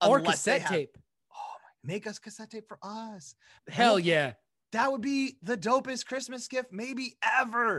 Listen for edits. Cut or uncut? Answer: cut